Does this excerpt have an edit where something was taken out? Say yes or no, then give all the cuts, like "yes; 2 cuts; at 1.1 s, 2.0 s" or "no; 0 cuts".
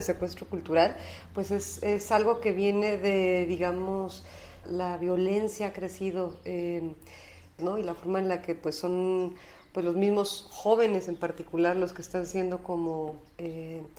yes; 2 cuts; at 4.6 s, 7.6 s